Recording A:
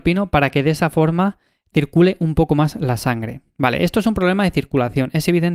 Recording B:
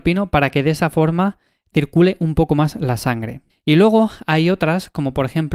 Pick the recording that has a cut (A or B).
B